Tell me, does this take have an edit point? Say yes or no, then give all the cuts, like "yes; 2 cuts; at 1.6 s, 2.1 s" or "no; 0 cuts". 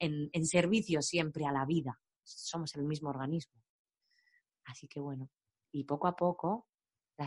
yes; 1 cut; at 2.2 s